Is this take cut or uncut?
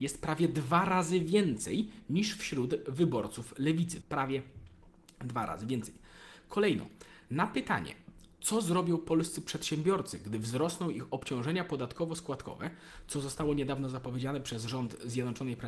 cut